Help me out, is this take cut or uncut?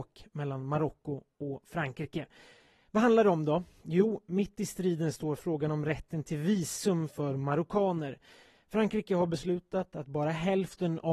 uncut